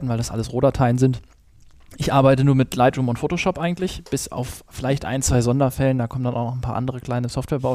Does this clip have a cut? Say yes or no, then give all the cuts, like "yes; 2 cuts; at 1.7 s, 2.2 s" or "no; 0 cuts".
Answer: no; 0 cuts